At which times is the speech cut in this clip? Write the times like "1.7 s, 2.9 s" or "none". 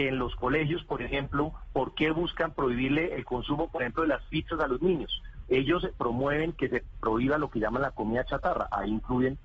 5.4 s